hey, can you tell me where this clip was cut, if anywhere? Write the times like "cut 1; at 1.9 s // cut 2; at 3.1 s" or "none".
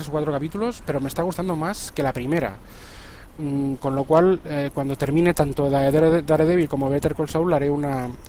none